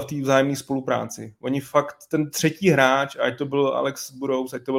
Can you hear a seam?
no; 0 cuts

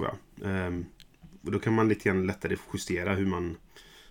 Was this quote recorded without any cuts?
yes; 0 cuts

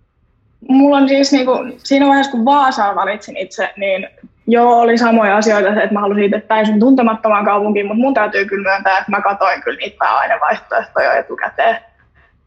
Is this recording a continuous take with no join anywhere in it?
yes; 0 cuts

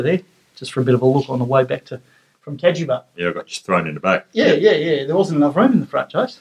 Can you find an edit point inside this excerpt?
yes; 1 cut; at 3.2 s

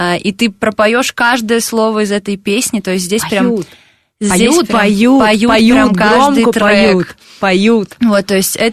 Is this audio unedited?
yes; 0 cuts

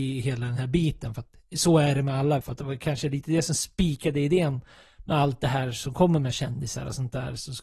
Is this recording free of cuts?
no; 1 cut; at 2.4 s

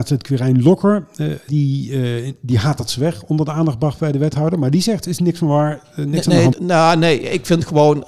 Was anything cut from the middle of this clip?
yes; 2 cuts; at 1.5 s, 6.5 s

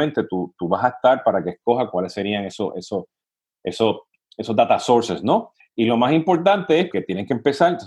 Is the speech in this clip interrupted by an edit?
yes; 2 cuts; at 5.6 s, 6.9 s

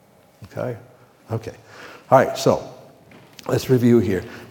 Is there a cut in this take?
yes; 1 cut; at 1.2 s

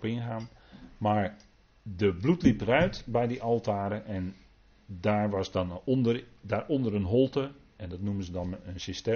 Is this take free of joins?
yes; 0 cuts

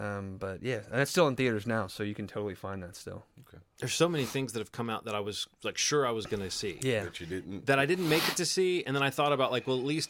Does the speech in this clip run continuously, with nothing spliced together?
yes; 0 cuts

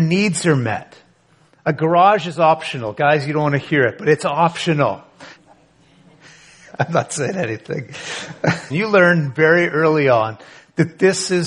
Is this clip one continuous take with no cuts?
no; 2 cuts; at 5.4 s, 8.7 s

